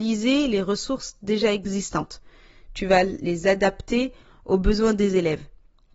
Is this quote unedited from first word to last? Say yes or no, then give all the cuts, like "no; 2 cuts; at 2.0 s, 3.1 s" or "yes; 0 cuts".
yes; 0 cuts